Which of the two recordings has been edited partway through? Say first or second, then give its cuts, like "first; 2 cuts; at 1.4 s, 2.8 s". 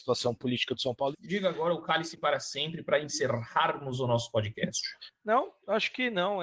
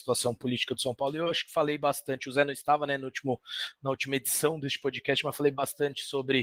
first; 1 cut; at 1.1 s